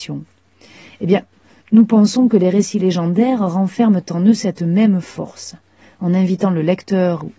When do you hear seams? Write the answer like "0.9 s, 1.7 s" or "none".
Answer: 1.6 s